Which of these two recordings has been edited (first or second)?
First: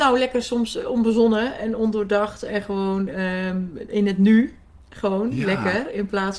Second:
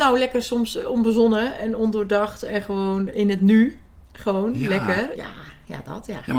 second